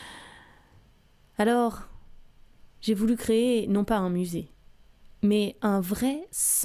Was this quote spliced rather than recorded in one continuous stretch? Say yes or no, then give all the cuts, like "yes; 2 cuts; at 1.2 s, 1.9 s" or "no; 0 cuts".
no; 0 cuts